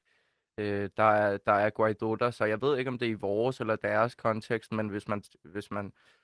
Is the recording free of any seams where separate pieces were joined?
yes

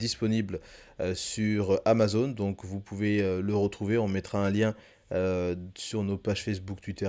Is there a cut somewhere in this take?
no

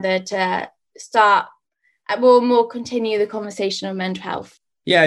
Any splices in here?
no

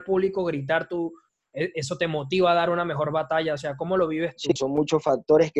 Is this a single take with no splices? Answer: no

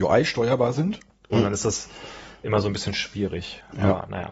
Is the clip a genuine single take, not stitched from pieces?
no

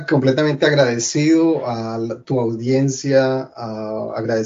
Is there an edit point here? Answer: no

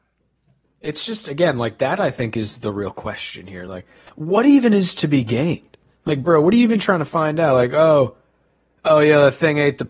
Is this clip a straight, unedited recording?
yes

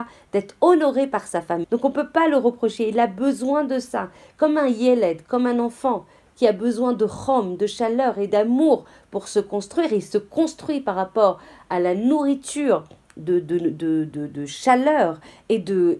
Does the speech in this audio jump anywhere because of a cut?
yes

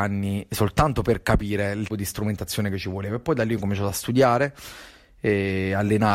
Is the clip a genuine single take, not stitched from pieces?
no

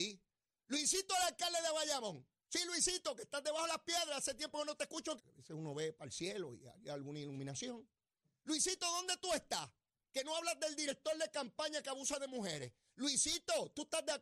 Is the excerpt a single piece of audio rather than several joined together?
no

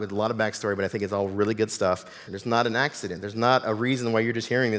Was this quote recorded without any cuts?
no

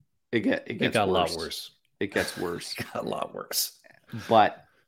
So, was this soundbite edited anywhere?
no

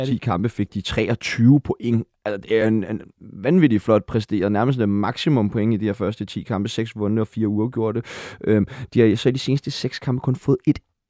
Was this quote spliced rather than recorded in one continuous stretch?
no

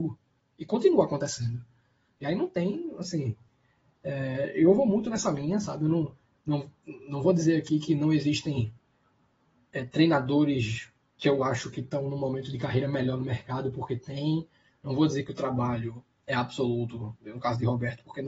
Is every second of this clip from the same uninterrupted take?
yes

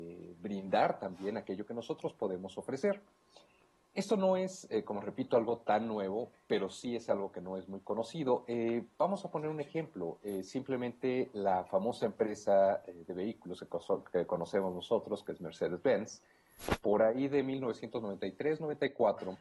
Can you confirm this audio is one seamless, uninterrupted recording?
yes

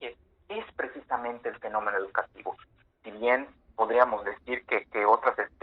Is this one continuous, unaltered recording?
yes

